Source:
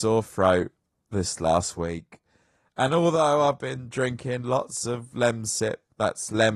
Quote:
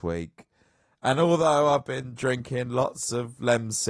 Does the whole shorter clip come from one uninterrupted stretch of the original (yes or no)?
yes